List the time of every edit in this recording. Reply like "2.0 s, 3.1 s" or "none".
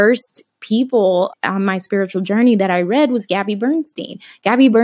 1.3 s